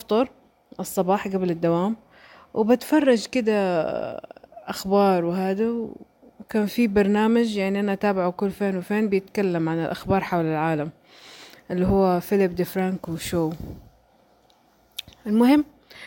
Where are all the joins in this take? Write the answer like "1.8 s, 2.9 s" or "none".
none

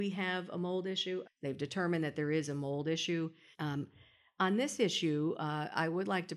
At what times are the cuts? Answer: 1.2 s, 3.5 s

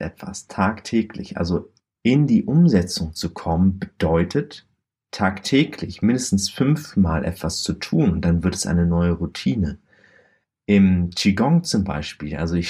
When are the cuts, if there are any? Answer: none

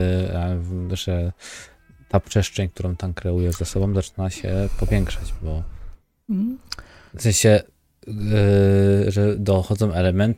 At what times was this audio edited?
none

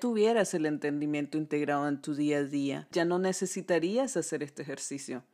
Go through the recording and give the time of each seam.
2.9 s

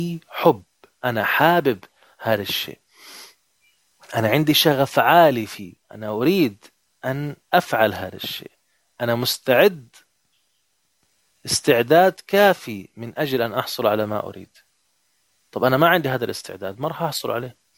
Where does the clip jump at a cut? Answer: 5.8 s

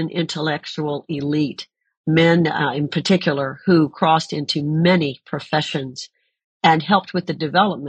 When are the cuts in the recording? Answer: none

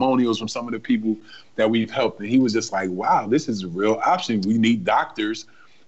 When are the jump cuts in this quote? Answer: none

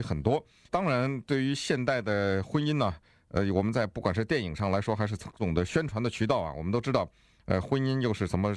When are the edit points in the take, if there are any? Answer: 5.4 s

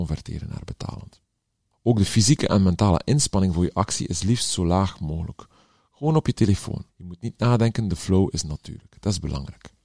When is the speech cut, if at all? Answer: 6.9 s

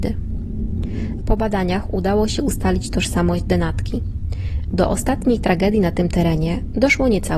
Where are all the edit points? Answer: 1.2 s, 4.7 s

